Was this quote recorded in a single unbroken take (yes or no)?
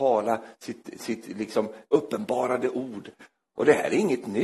yes